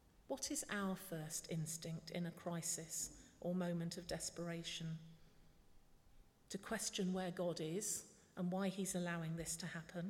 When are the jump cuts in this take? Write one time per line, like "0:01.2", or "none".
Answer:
0:06.3